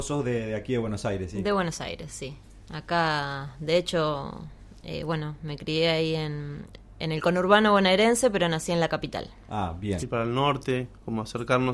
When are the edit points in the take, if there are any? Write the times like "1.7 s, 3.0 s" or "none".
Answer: 10.0 s

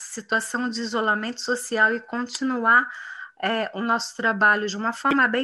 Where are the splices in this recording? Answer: none

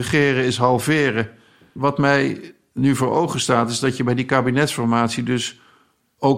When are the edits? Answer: 1.7 s

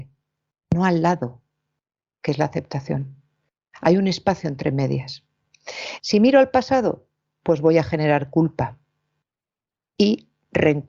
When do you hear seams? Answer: 6.0 s

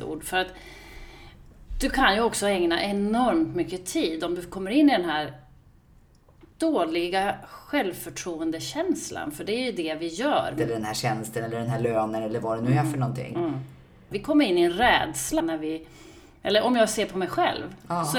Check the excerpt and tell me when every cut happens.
10.6 s, 14.1 s, 15.4 s

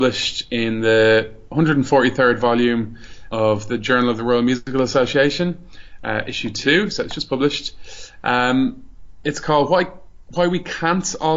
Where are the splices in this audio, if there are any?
3.3 s

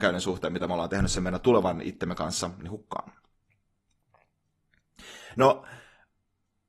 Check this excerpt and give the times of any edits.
none

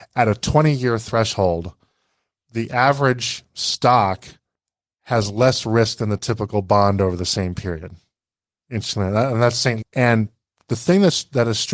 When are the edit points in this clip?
9.8 s

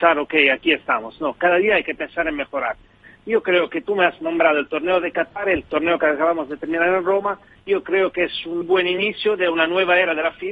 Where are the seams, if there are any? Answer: 8.6 s

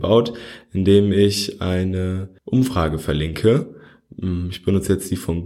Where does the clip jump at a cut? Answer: 2.4 s

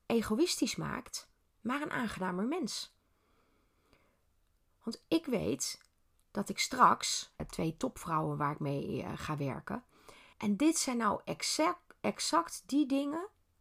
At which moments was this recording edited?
7.4 s, 10.3 s

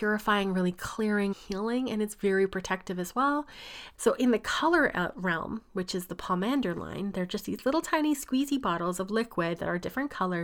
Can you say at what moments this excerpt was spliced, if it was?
1.3 s, 3.9 s

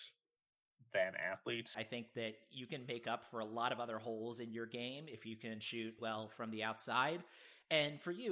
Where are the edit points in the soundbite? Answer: 1.7 s, 6.0 s

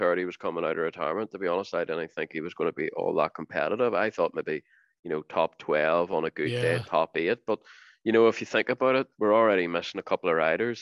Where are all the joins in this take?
9.1 s

